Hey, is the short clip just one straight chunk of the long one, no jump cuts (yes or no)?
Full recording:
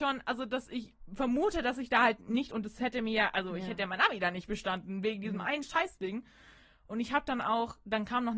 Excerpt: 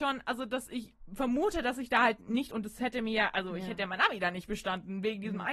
yes